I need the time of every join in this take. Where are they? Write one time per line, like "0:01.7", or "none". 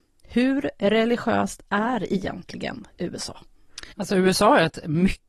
0:03.9